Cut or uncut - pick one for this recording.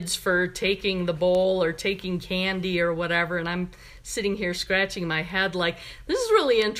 uncut